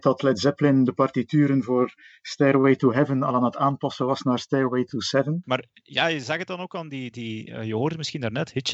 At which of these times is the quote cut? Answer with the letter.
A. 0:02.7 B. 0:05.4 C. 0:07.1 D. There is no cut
B